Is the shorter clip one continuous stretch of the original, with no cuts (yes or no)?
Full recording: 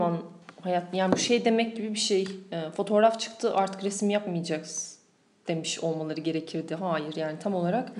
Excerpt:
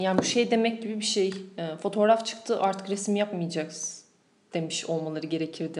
yes